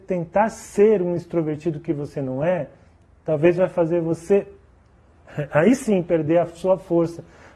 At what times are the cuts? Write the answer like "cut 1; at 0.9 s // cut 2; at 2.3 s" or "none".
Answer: none